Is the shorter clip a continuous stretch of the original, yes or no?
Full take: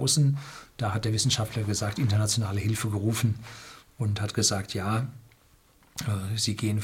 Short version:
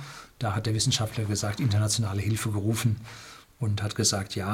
yes